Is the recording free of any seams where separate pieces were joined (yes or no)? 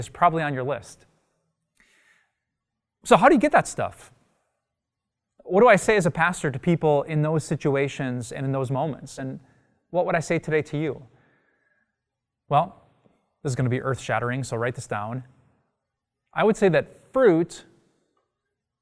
yes